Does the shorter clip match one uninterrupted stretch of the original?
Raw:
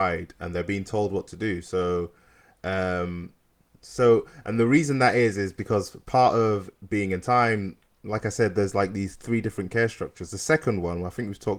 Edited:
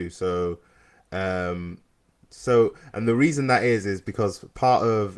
yes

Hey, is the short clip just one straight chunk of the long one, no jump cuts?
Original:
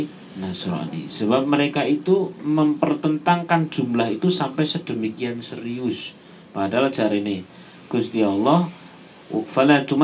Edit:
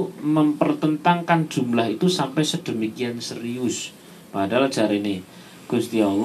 yes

